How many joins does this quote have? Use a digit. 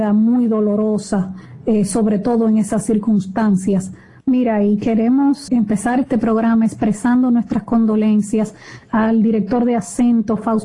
2